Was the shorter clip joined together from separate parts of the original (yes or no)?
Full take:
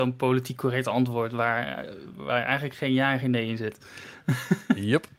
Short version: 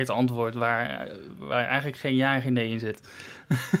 no